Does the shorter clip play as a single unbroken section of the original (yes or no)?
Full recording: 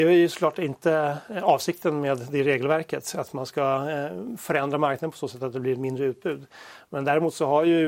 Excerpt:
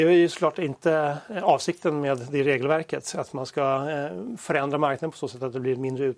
yes